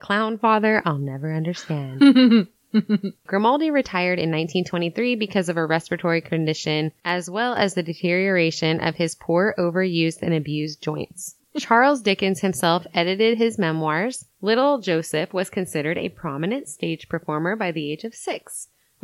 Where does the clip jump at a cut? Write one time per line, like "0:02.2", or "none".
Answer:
0:14.3